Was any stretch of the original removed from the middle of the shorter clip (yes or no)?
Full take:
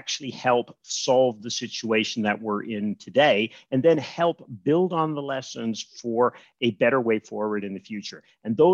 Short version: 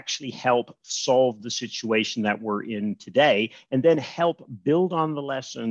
no